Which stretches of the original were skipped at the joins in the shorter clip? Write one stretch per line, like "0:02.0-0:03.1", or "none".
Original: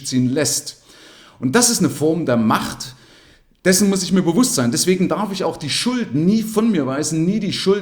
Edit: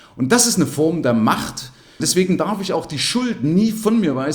0:03.2-0:04.7